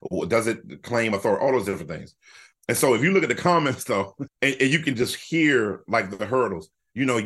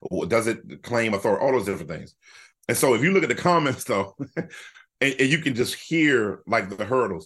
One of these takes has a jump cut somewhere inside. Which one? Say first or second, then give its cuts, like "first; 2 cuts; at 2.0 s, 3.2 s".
first; 1 cut; at 4.3 s